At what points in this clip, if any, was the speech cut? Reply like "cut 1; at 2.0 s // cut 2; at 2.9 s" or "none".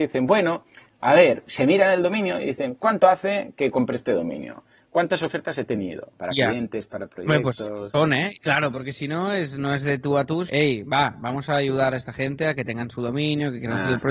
cut 1; at 6.2 s // cut 2; at 8.3 s // cut 3; at 10.5 s